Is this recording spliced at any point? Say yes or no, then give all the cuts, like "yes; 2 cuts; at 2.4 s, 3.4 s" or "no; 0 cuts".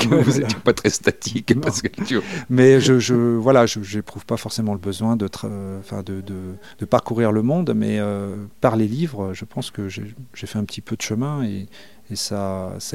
no; 0 cuts